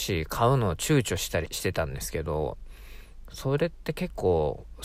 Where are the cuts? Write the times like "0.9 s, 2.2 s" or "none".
1.5 s